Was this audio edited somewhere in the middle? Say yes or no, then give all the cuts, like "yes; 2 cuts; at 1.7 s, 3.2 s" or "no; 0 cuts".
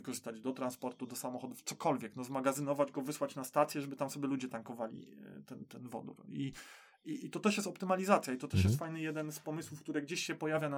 no; 0 cuts